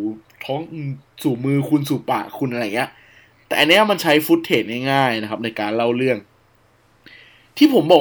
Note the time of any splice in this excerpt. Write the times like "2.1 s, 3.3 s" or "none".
none